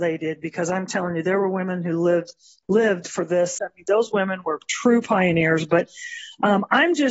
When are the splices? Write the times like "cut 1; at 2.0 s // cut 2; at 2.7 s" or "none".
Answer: cut 1; at 3.6 s